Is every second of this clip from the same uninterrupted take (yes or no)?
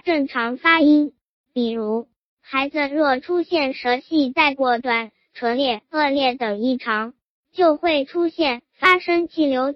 yes